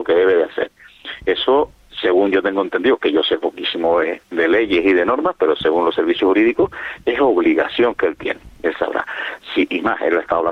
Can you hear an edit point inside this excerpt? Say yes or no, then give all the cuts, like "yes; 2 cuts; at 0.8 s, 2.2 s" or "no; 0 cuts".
no; 0 cuts